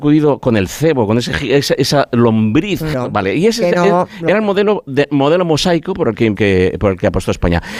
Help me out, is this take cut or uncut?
cut